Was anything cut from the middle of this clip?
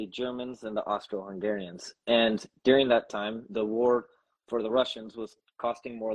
no; 0 cuts

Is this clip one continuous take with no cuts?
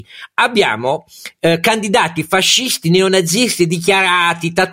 yes; 0 cuts

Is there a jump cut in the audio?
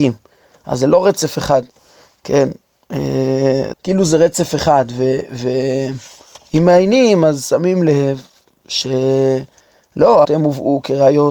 yes; 2 cuts; at 3.7 s, 10.2 s

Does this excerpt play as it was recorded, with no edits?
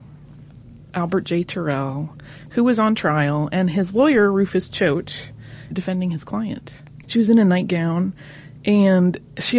no; 2 cuts; at 5.7 s, 7.0 s

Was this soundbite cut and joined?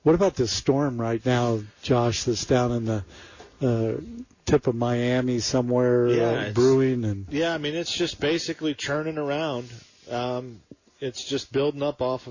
no; 0 cuts

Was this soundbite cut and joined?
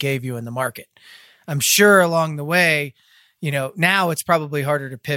no; 0 cuts

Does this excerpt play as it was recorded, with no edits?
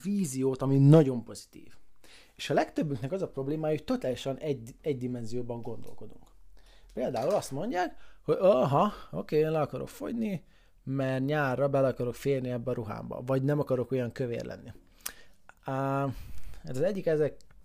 yes; 0 cuts

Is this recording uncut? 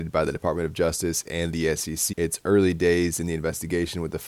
no; 1 cut; at 2.1 s

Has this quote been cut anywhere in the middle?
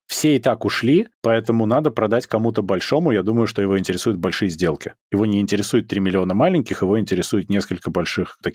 no; 0 cuts

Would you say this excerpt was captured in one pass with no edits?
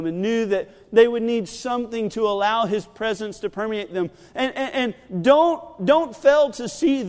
yes; 0 cuts

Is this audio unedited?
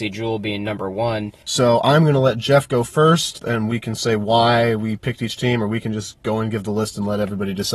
no; 2 cuts; at 1.4 s, 3.4 s

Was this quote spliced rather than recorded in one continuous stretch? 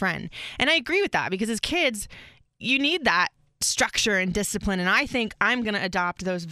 no; 0 cuts

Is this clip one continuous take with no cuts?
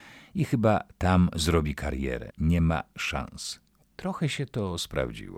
no; 2 cuts; at 2.3 s, 3.8 s

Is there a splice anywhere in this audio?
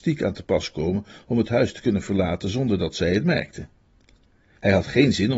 no; 0 cuts

